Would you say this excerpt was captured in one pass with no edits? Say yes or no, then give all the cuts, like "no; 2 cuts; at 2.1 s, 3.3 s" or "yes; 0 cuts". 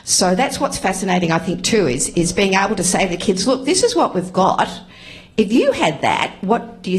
yes; 0 cuts